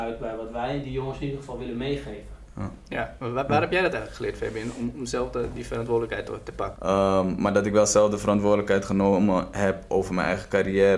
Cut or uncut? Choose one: cut